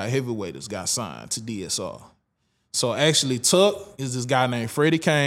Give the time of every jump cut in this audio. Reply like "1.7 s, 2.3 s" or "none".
none